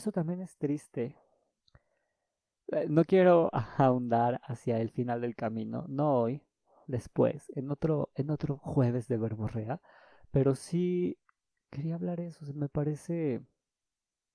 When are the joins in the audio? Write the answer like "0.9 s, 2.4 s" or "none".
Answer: none